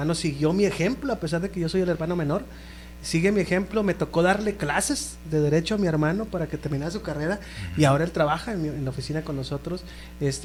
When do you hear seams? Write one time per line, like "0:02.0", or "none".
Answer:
none